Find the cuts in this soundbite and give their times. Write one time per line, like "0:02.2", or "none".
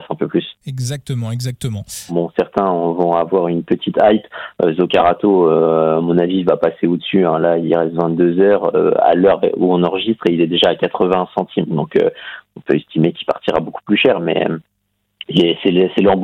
0:02.1